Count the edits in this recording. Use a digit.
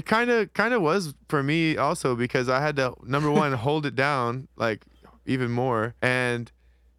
1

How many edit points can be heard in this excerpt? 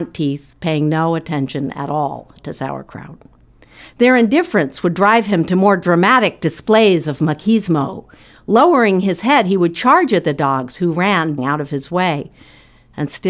1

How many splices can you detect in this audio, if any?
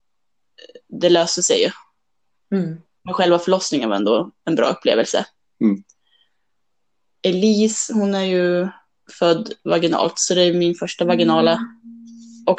0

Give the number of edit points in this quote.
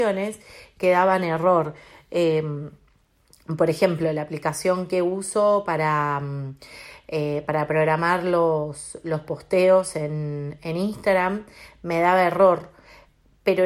0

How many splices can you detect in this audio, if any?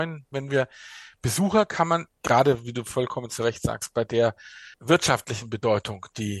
2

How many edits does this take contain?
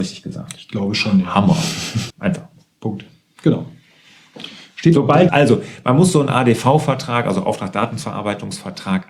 2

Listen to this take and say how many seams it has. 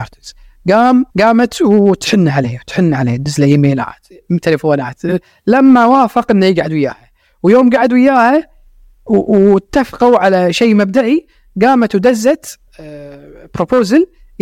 2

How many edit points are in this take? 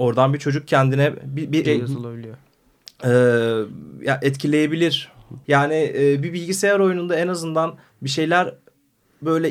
2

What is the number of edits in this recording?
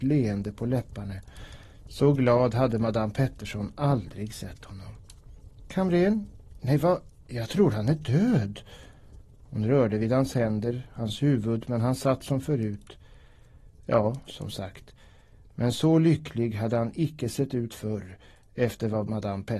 1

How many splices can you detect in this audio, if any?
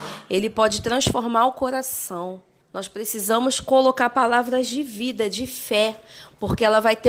1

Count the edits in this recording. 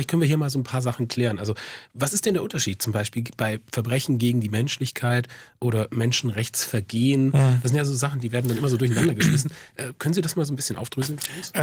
0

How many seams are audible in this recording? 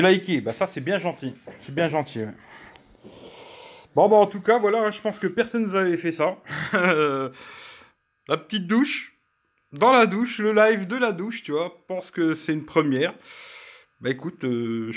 0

